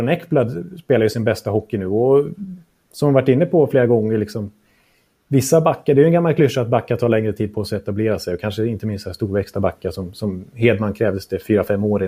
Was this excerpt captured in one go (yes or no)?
yes